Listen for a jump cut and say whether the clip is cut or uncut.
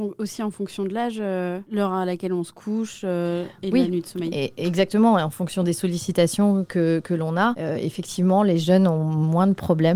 uncut